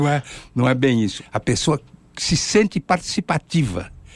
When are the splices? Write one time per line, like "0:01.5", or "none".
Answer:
0:01.2